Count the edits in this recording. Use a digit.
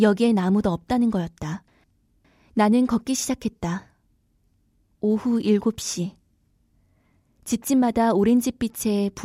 0